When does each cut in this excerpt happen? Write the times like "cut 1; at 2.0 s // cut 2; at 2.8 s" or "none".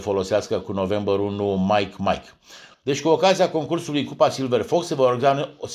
cut 1; at 2.7 s